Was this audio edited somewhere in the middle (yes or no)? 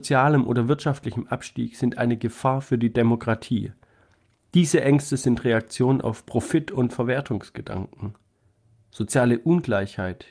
no